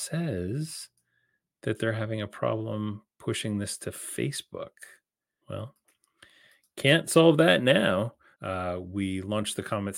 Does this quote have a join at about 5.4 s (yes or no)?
yes